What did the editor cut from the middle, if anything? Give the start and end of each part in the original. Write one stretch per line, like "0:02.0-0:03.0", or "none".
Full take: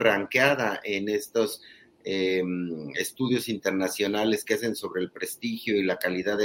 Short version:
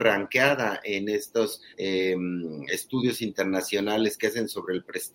0:01.7-0:02.0